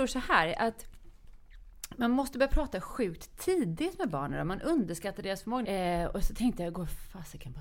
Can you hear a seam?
yes; 1 cut; at 5.6 s

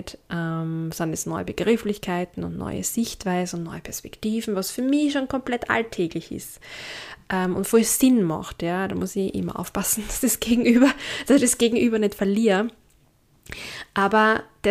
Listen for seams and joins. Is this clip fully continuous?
yes; 0 cuts

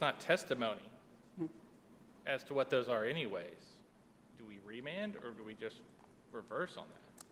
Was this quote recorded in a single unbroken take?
yes; 0 cuts

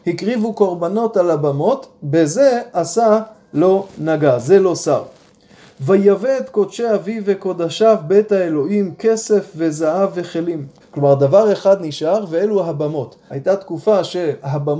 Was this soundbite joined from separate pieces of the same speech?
yes; 2 cuts; at 10.8 s, 13.3 s

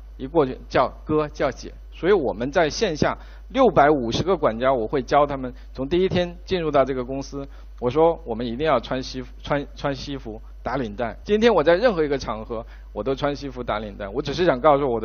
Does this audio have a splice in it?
yes; 1 cut; at 11.2 s

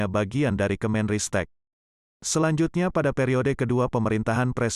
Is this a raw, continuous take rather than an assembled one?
yes; 0 cuts

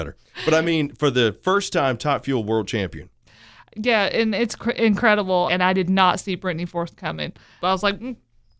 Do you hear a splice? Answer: yes; 2 cuts; at 5.5 s, 7.6 s

